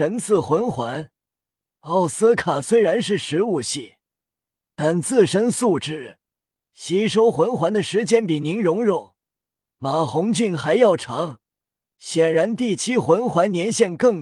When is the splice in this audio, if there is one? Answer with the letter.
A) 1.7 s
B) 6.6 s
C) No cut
B